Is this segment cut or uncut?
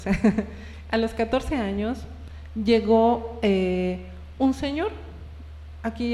uncut